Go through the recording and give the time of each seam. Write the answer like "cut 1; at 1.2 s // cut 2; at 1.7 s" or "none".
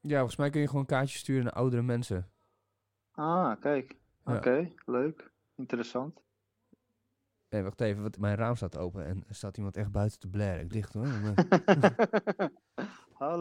cut 1; at 8.2 s // cut 2; at 10.7 s // cut 3; at 12.0 s

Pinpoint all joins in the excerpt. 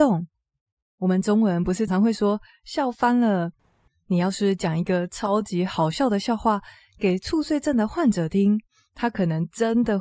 cut 1; at 1.9 s

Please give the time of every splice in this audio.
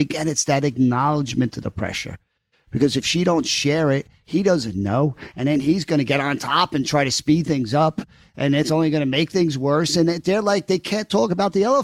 none

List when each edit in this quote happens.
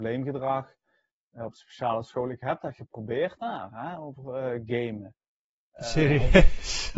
cut 1; at 5.6 s

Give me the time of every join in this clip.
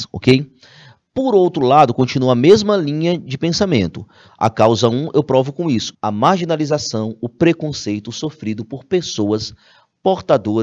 cut 1; at 5.9 s

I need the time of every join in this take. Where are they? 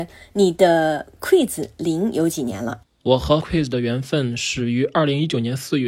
cut 1; at 2.8 s

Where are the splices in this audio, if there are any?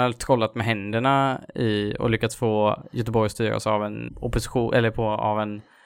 cut 1; at 4.1 s

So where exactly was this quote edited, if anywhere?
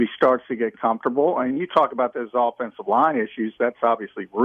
none

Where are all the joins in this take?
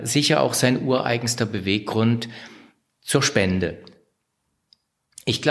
none

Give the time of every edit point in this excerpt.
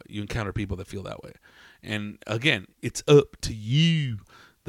none

